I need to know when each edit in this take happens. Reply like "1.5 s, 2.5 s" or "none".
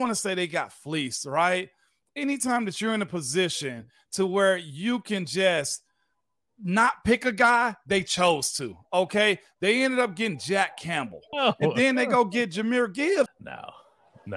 11.3 s, 13.3 s